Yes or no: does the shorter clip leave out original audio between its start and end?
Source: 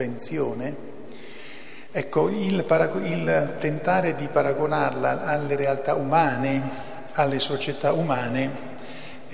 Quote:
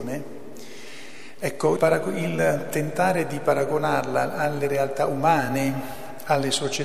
yes